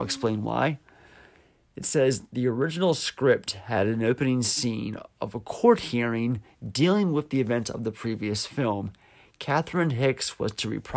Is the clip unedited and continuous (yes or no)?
yes